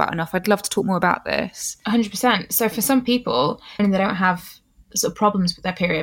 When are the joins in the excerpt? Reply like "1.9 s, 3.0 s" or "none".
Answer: 3.8 s